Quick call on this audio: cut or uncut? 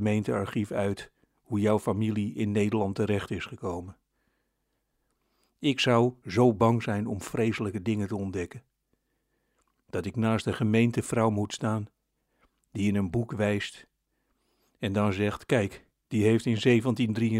cut